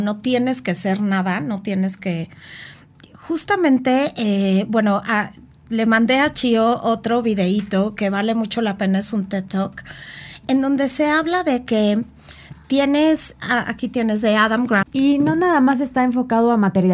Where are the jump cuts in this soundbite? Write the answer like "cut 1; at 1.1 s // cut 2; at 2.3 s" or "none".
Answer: cut 1; at 10.4 s // cut 2; at 14.8 s